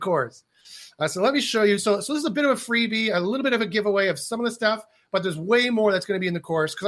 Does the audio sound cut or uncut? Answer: uncut